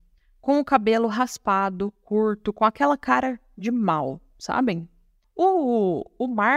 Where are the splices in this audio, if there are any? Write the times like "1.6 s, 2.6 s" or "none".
5.2 s